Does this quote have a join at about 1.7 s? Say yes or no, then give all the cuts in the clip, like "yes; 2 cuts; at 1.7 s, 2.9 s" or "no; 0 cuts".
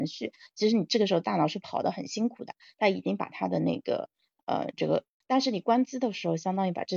no; 1 cut; at 5.2 s